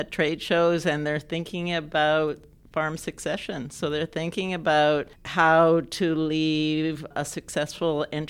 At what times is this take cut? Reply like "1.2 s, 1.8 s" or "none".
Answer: none